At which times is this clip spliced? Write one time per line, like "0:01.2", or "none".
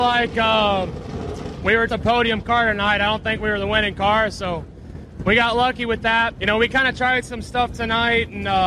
0:01.9
0:06.4